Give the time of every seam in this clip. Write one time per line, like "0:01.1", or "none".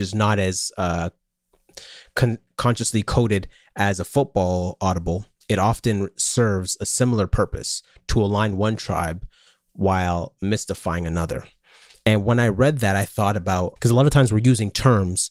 0:13.8